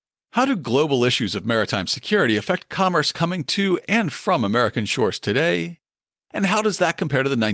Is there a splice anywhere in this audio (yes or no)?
no